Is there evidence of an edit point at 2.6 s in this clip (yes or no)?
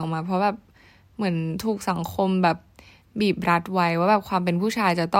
no